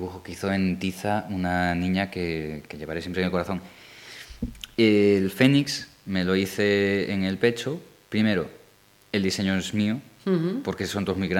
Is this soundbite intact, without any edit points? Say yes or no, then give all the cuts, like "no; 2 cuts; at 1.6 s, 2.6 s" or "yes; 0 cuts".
yes; 0 cuts